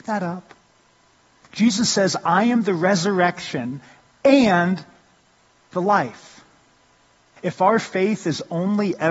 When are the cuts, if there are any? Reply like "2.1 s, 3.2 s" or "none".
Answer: 7.4 s